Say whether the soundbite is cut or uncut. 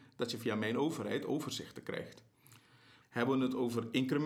cut